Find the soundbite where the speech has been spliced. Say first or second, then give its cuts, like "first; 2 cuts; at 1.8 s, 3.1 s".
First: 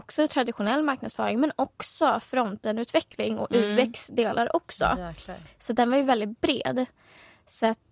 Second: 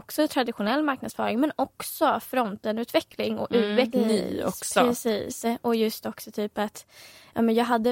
second; 1 cut; at 3.9 s